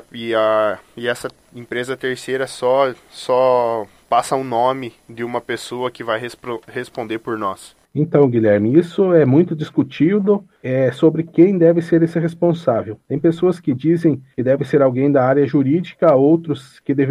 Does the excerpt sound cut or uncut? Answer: uncut